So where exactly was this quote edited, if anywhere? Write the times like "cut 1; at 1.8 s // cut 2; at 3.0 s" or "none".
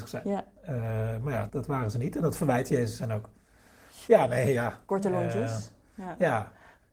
cut 1; at 1.5 s // cut 2; at 4.1 s